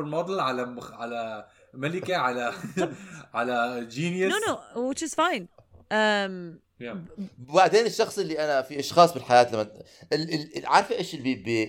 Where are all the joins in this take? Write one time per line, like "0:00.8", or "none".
none